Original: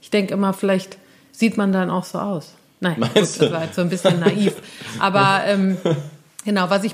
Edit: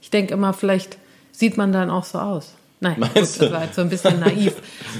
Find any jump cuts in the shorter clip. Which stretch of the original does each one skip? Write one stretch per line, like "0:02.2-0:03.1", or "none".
none